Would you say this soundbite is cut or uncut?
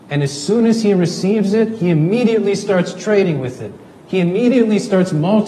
uncut